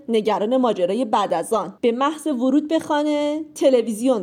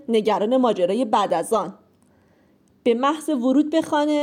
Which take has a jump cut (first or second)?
first